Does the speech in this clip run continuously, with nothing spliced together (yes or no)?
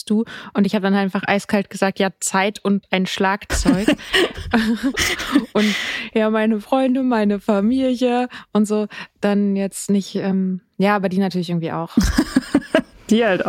yes